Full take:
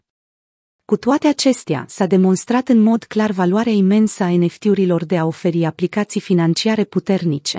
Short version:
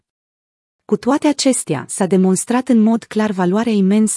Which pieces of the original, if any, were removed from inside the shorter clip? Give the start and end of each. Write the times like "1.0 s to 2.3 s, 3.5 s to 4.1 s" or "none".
none